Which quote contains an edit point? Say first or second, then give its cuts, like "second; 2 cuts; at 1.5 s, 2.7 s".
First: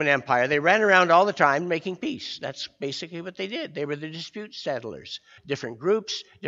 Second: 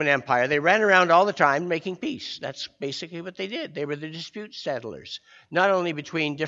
first; 1 cut; at 5.4 s